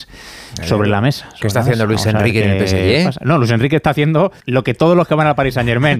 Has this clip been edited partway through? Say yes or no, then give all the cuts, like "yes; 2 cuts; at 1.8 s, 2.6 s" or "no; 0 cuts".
yes; 1 cut; at 4.4 s